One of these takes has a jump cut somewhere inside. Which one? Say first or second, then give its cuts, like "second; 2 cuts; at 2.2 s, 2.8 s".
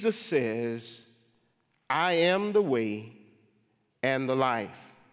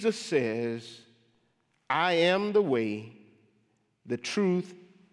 first; 1 cut; at 3.9 s